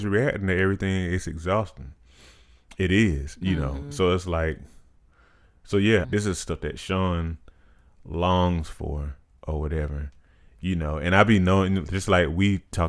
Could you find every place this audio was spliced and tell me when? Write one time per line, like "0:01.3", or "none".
0:06.0